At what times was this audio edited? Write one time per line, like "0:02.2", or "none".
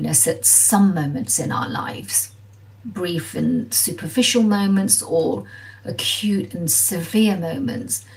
none